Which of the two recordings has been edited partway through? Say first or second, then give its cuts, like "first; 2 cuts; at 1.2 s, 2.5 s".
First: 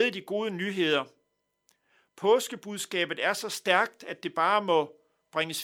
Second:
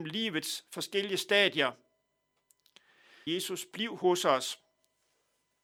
second; 1 cut; at 3.3 s